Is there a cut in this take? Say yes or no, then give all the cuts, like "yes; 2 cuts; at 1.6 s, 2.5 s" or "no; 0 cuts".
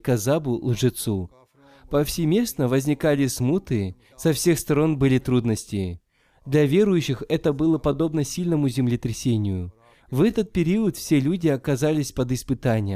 yes; 1 cut; at 4.1 s